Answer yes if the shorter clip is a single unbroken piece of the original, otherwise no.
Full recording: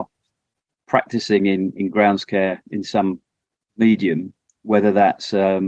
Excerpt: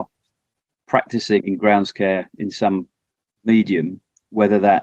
no